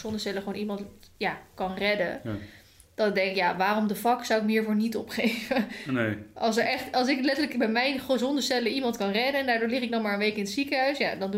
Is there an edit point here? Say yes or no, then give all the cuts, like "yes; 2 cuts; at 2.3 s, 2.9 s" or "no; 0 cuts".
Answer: no; 0 cuts